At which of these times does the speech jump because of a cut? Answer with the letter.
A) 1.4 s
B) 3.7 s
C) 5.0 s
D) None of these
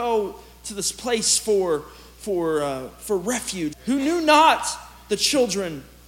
B